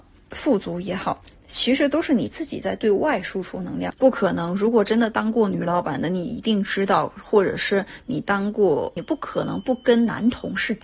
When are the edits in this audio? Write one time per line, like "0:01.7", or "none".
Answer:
0:03.9
0:09.0